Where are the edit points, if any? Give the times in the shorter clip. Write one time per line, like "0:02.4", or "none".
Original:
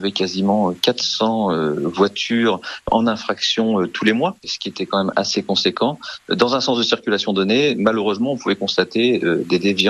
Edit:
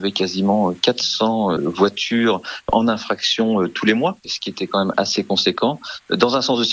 0:01.6